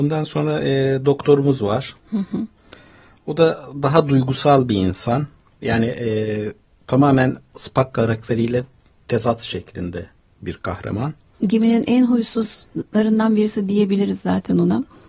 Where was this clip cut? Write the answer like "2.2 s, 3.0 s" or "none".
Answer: 2.0 s

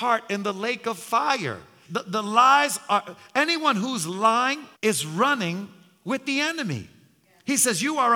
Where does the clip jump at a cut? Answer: 1.8 s, 4.7 s

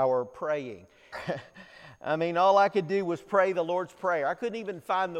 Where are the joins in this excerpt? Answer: 1.1 s

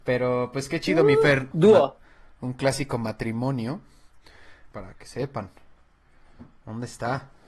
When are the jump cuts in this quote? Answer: 1.5 s, 4.7 s

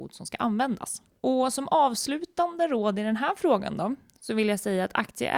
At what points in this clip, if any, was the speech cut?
1.2 s

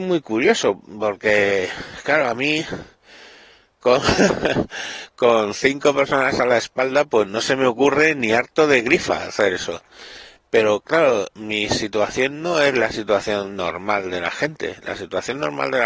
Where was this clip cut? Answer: none

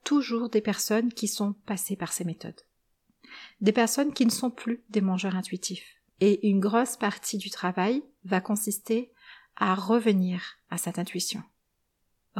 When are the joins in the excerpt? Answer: 6.1 s

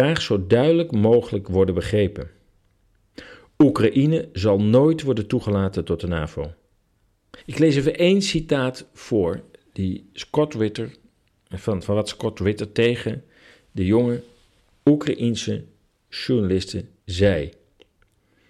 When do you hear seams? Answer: 7.4 s, 11.8 s, 17.0 s

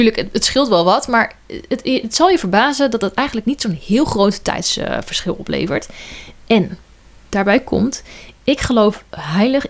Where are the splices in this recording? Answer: none

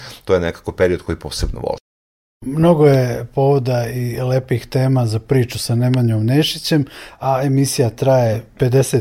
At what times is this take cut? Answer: none

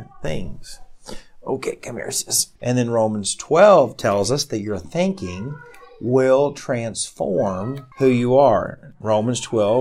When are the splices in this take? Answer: 2.6 s, 7.9 s

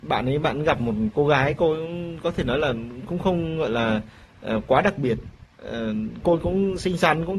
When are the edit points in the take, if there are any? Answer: 6.2 s

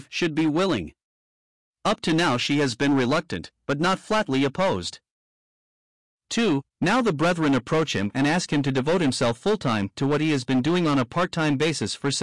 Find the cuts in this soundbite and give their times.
6.7 s

